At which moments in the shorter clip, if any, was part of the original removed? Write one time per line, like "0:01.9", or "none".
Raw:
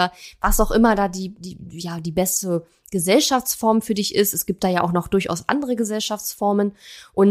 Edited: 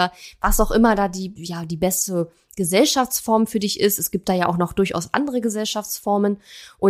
0:01.4